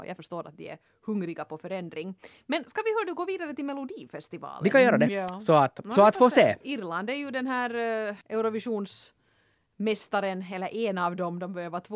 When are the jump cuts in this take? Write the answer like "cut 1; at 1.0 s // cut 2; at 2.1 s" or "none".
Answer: cut 1; at 5.1 s // cut 2; at 6.6 s // cut 3; at 8.2 s